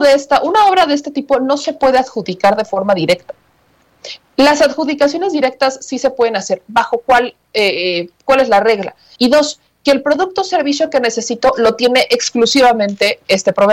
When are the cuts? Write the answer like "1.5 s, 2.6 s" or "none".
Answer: 9.2 s